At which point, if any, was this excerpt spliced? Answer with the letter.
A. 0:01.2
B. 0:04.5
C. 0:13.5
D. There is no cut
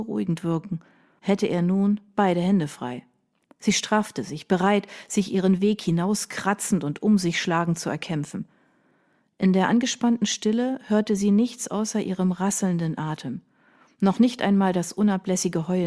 A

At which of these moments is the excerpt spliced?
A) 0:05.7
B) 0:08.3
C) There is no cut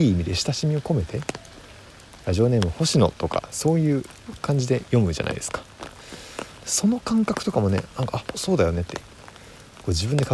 B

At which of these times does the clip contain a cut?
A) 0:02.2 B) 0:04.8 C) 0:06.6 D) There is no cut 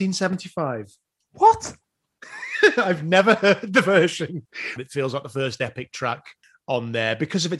B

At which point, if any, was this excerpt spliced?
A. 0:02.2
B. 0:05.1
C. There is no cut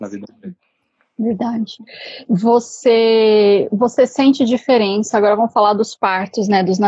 C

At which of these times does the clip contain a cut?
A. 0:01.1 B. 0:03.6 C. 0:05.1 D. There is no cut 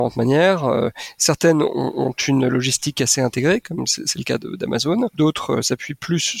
C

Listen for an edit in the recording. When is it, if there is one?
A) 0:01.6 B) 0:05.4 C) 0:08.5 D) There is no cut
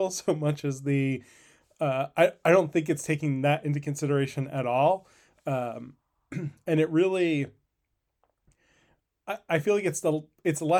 D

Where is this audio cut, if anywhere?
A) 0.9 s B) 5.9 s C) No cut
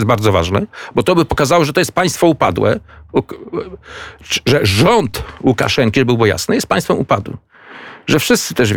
C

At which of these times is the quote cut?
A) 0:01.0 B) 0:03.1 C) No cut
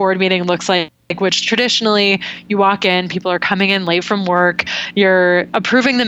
A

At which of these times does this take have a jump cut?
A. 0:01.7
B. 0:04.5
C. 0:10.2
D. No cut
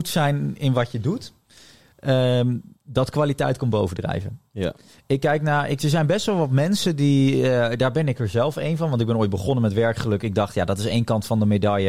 D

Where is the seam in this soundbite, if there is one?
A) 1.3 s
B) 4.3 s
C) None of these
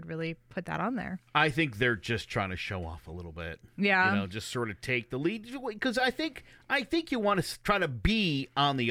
A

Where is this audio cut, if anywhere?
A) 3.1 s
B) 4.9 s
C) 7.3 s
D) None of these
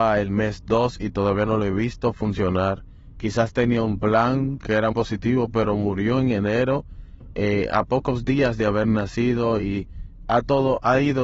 B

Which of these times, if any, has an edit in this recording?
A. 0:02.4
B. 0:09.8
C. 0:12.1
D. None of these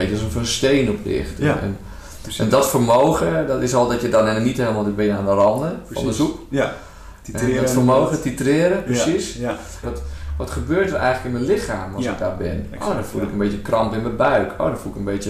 B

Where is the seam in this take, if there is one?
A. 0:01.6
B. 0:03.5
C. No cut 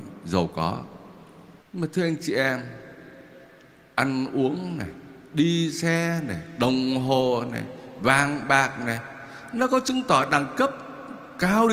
A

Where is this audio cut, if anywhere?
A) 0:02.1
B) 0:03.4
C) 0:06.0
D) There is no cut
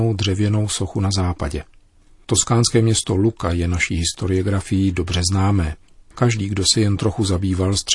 D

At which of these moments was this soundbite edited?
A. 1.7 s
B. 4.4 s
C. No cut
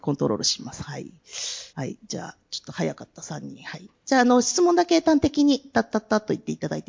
A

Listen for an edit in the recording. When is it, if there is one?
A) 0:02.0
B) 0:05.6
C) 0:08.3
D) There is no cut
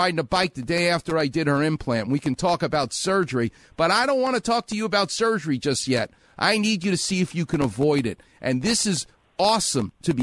D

